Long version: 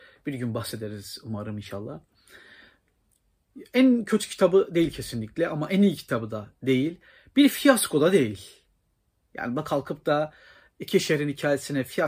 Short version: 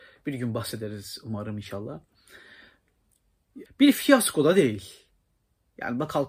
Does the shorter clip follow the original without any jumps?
no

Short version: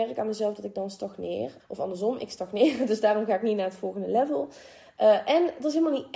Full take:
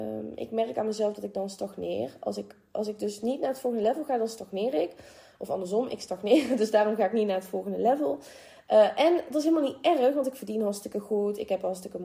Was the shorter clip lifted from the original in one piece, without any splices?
no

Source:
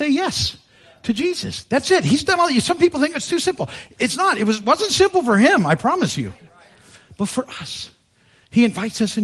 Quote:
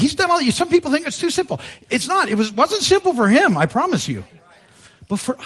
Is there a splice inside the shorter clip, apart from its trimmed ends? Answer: no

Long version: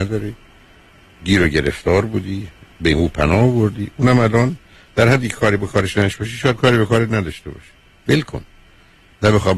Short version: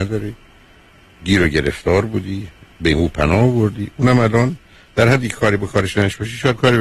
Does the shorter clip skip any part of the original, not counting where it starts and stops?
no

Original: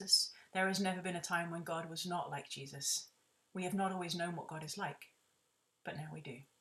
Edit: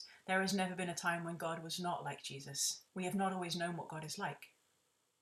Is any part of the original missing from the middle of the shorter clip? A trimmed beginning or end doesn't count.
yes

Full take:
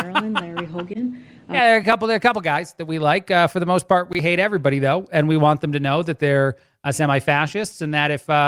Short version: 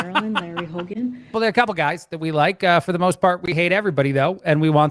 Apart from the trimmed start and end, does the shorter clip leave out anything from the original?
yes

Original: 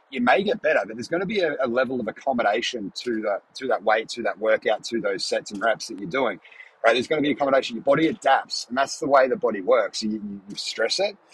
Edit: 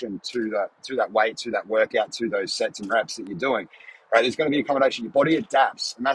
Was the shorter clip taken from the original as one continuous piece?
yes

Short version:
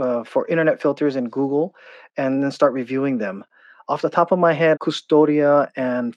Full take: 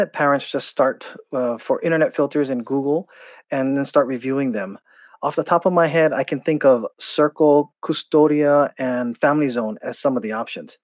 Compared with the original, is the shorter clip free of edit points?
no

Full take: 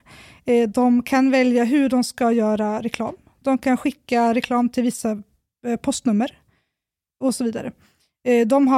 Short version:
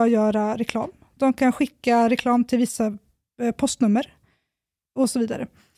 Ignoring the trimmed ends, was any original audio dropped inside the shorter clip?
no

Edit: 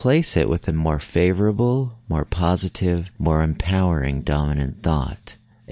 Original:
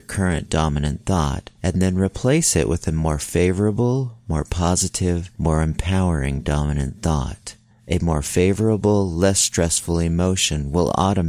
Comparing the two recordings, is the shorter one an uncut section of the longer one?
yes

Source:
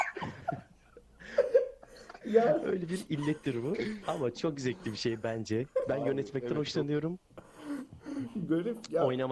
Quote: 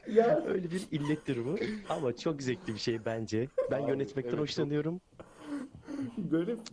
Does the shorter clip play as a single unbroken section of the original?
yes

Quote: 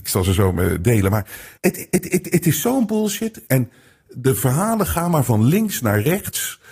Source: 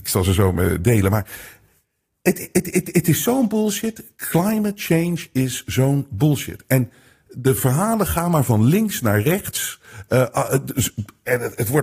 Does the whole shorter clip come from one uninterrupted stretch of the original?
no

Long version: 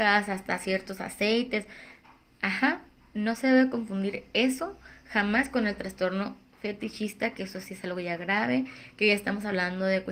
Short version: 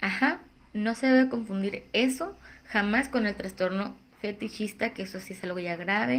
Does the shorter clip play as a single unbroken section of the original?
yes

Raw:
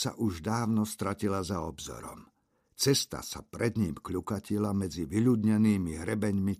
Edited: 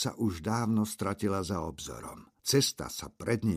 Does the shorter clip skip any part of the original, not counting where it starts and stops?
yes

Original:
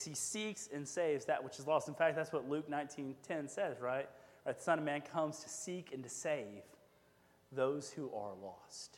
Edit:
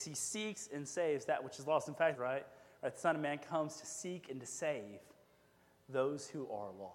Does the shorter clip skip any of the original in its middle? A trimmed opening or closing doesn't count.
yes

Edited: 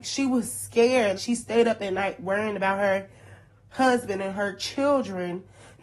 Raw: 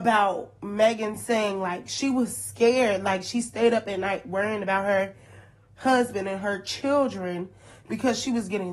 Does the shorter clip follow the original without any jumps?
no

